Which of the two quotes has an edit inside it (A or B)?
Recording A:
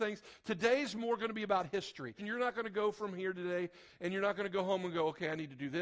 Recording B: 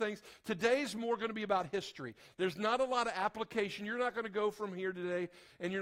A